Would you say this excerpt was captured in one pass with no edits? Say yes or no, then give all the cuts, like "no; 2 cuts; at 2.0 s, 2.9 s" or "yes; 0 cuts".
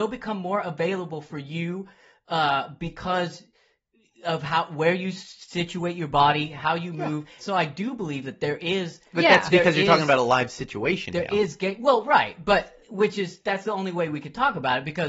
no; 2 cuts; at 7.4 s, 12.8 s